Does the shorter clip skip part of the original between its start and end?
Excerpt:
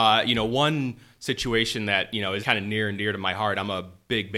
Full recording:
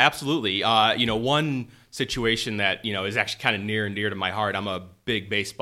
yes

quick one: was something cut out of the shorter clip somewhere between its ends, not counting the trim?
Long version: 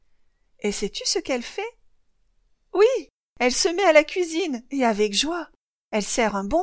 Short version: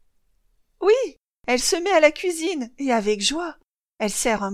no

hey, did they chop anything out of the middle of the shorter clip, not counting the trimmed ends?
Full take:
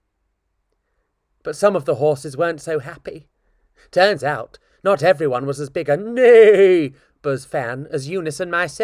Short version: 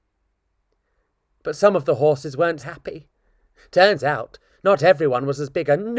yes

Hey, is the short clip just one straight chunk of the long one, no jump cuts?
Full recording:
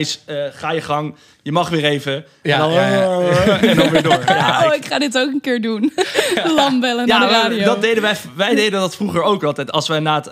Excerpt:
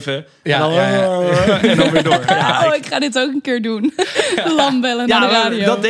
yes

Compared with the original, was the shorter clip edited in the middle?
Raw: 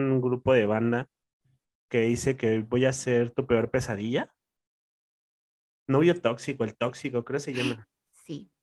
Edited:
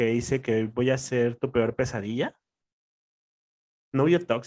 no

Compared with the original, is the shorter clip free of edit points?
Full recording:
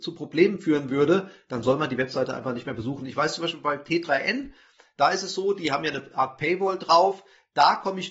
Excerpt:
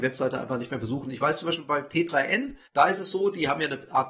no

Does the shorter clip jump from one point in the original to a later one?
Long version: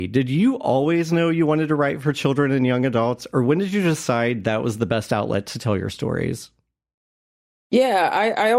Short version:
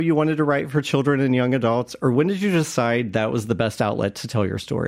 no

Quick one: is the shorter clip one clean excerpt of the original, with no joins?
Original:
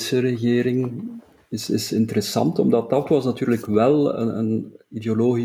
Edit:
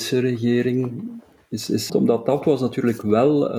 no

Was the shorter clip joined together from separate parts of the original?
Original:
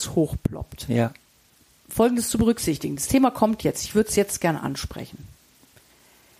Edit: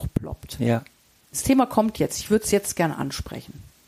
yes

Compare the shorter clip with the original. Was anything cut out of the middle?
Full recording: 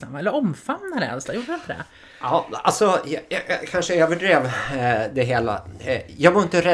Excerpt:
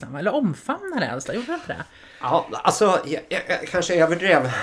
no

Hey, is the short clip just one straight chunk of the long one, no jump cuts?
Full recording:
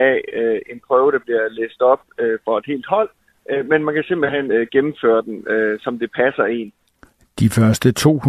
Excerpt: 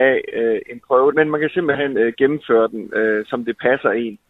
no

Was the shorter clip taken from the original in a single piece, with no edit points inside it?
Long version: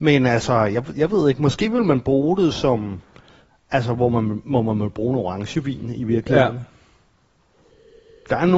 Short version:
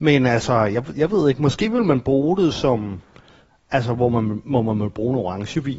yes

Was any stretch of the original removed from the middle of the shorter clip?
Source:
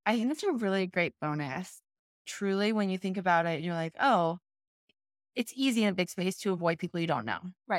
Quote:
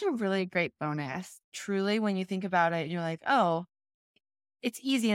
yes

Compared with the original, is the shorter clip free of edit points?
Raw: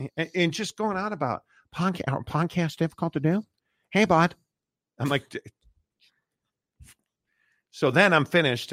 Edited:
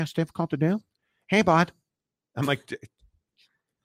yes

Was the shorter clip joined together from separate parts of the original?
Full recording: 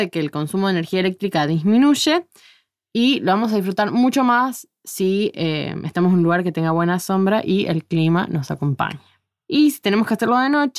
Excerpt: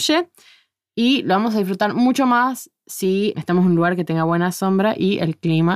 yes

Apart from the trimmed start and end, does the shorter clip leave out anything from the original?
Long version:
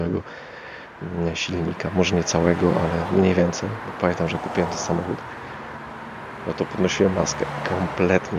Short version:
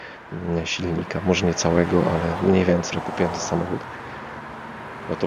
yes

